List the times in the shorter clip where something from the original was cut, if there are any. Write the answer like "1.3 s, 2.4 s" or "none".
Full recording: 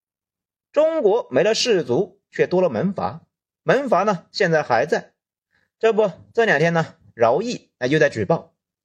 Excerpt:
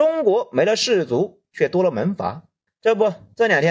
2.7 s